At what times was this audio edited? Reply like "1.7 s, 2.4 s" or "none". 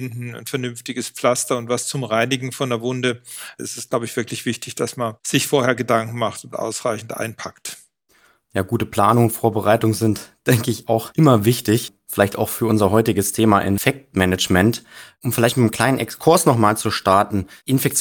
none